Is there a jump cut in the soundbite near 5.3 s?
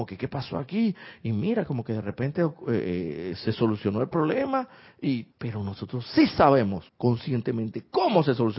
yes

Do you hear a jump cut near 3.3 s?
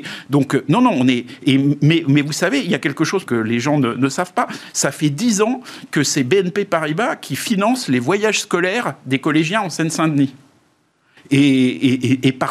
yes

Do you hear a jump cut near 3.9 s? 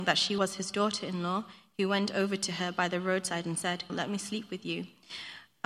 yes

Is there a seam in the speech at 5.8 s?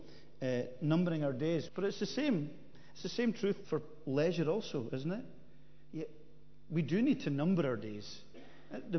no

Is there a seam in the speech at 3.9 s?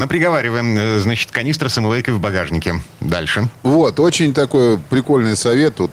no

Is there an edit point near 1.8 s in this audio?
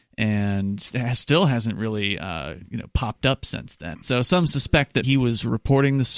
no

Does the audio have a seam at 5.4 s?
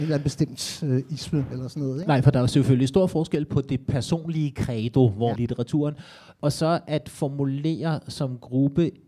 yes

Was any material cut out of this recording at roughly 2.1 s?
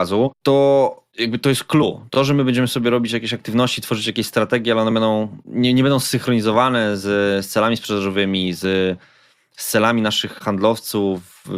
no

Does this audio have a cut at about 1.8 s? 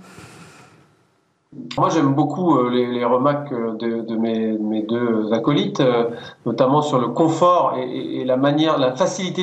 yes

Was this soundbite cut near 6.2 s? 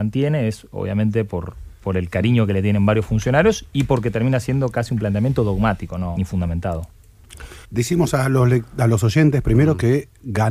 yes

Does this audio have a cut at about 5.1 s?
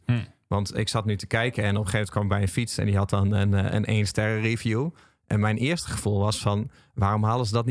no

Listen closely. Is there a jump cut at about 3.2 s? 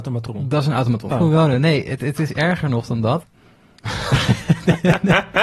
yes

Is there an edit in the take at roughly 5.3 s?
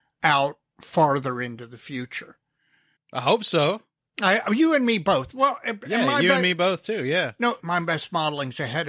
no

